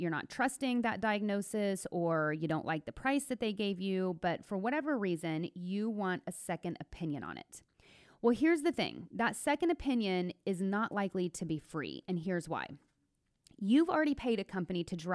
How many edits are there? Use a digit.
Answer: 0